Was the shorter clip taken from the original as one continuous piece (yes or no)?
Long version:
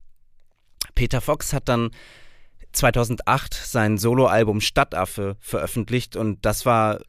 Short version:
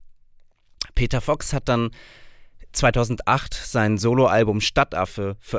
yes